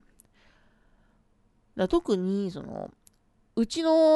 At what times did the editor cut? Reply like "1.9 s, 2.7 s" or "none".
1.7 s